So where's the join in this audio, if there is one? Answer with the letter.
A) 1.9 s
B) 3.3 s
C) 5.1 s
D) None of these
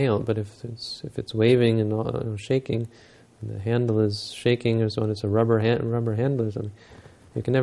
D